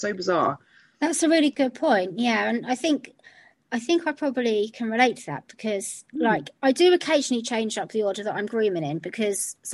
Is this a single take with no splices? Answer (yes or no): yes